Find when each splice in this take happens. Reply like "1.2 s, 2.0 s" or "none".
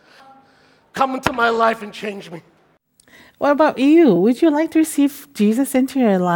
none